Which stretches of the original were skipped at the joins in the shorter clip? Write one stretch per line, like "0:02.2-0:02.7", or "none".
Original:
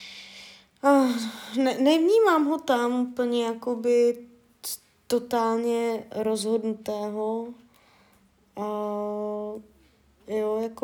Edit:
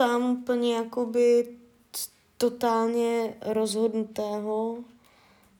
none